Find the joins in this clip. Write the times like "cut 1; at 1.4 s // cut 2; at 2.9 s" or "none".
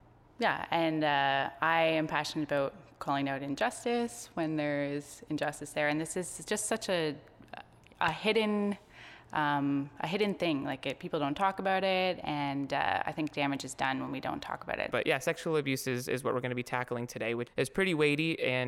cut 1; at 14.9 s // cut 2; at 17.5 s